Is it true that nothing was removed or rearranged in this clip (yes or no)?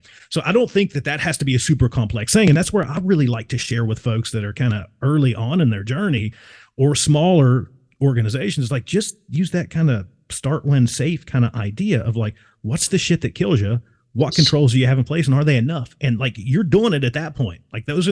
yes